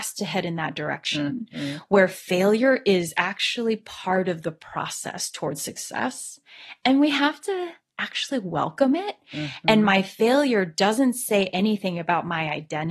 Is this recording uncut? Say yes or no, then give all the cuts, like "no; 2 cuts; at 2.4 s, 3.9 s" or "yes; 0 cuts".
yes; 0 cuts